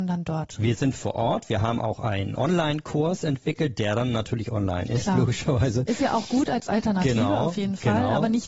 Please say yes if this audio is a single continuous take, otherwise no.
yes